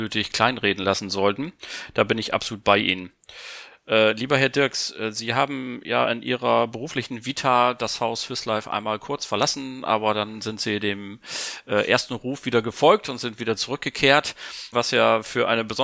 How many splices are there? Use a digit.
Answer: 1